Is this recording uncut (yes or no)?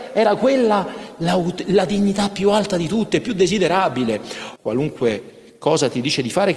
no